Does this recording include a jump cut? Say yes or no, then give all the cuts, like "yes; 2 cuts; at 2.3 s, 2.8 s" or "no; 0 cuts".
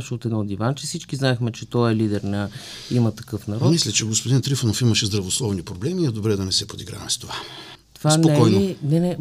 yes; 1 cut; at 7.8 s